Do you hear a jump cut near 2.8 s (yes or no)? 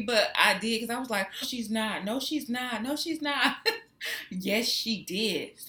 no